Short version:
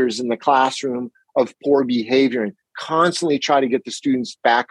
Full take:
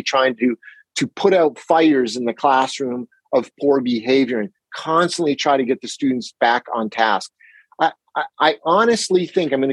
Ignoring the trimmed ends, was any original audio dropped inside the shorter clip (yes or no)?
no